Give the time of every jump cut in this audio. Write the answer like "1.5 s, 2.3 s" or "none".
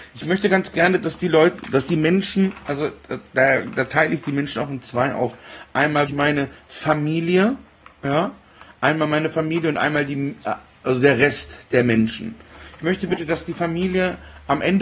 6.1 s